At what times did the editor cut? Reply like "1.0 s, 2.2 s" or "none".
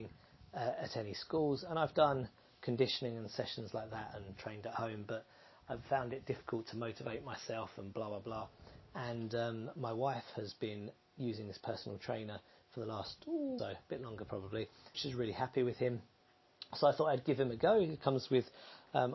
13.6 s, 14.9 s